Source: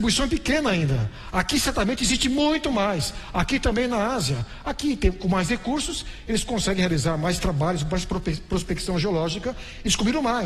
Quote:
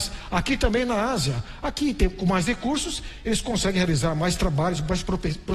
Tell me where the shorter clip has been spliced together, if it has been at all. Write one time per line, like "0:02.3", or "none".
none